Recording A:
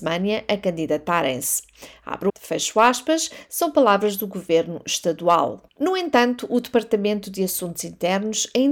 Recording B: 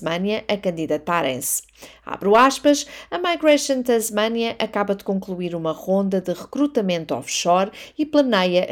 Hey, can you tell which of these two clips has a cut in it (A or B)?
A